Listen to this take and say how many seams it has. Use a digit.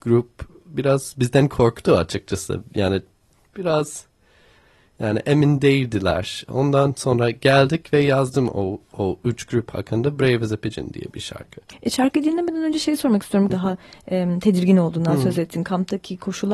1